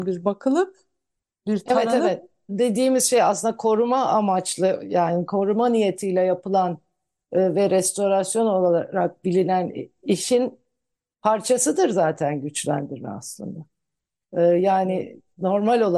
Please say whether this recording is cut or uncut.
cut